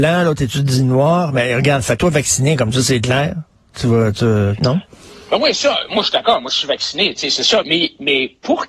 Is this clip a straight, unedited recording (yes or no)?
no